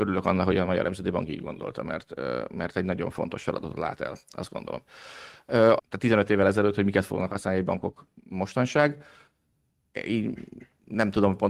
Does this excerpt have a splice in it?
yes; 1 cut; at 5.8 s

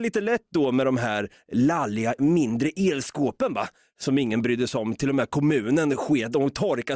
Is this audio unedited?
no; 1 cut; at 2.2 s

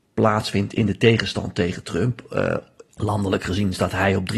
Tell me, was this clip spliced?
yes; 1 cut; at 2.9 s

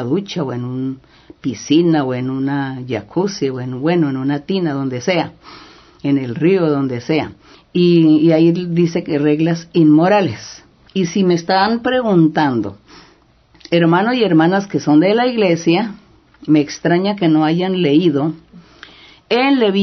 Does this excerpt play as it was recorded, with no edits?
no; 2 cuts; at 7.5 s, 10.9 s

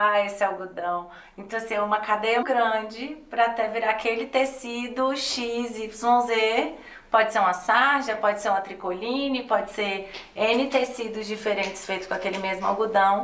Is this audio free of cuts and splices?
no; 1 cut; at 2.4 s

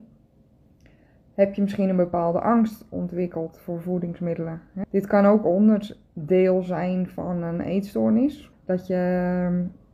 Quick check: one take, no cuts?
no; 2 cuts; at 4.8 s, 8.5 s

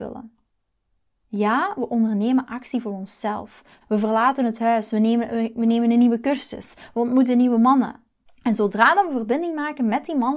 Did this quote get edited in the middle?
yes; 2 cuts; at 3.8 s, 8.3 s

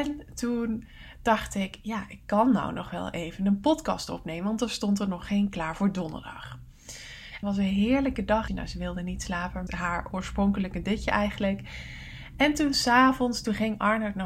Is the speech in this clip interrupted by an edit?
yes; 3 cuts; at 7.4 s, 8.5 s, 9.7 s

